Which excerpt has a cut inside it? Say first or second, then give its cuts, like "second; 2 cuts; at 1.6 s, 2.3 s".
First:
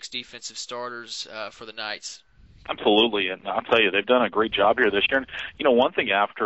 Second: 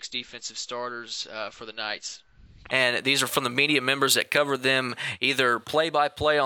second; 1 cut; at 2.7 s